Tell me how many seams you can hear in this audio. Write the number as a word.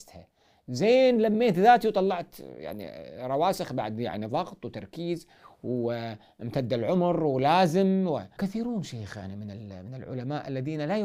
one